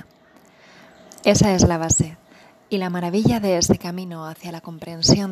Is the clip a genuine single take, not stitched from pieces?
yes; 0 cuts

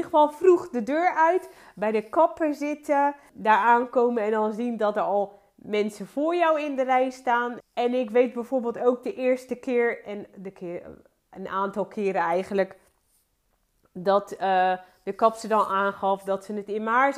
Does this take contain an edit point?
yes; 2 cuts; at 3.3 s, 7.6 s

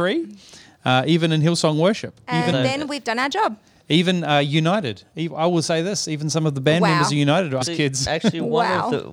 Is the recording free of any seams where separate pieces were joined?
no; 2 cuts; at 2.5 s, 7.6 s

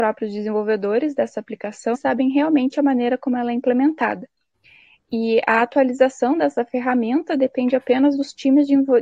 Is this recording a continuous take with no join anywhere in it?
no; 1 cut; at 1.9 s

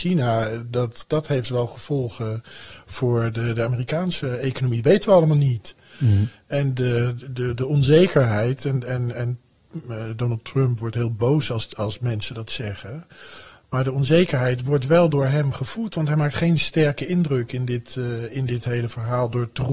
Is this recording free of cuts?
yes; 0 cuts

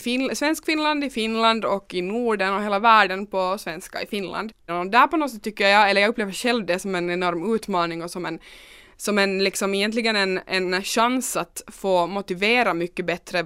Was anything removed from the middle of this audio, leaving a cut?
yes; 1 cut; at 4.7 s

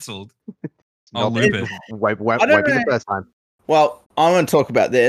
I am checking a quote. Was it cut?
yes; 1 cut; at 4.0 s

